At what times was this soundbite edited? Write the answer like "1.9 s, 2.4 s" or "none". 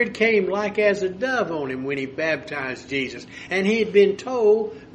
none